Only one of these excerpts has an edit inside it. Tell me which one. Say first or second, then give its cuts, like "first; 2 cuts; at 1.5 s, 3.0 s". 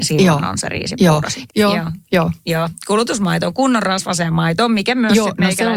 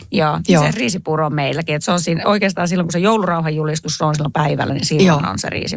first; 1 cut; at 1.5 s